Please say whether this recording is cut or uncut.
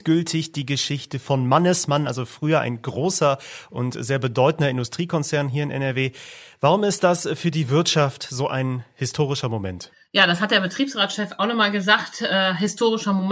uncut